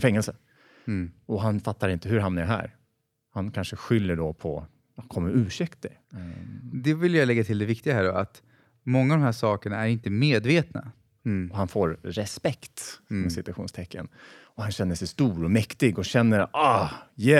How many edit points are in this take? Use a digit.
2